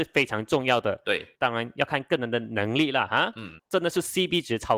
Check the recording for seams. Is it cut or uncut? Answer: cut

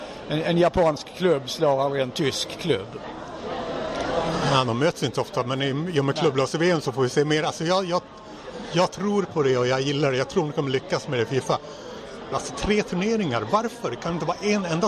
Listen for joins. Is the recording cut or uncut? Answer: cut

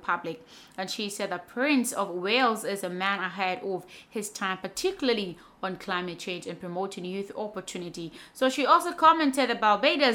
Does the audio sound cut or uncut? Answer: uncut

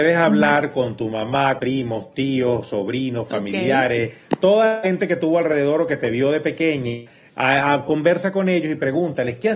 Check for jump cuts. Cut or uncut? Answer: cut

